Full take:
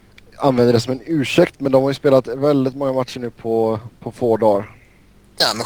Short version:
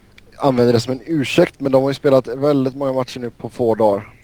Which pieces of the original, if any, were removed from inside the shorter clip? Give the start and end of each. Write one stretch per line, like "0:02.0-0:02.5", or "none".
0:03.3-0:03.9